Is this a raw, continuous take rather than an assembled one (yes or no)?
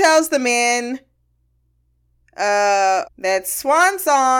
no